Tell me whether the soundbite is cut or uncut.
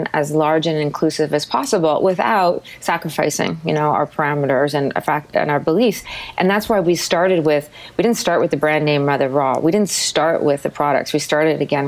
uncut